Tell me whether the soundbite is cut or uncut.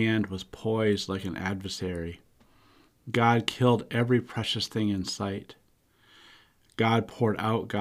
uncut